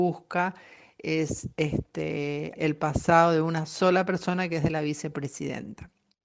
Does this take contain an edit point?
yes; 1 cut; at 2.6 s

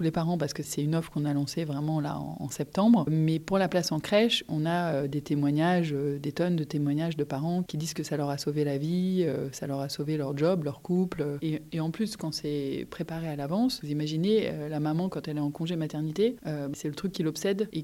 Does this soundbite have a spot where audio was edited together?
yes; 2 cuts; at 11.4 s, 16.7 s

